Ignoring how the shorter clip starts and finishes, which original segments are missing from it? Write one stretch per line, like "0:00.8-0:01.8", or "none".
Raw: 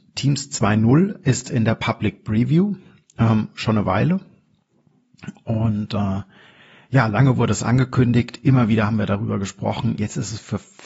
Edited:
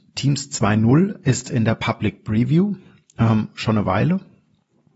none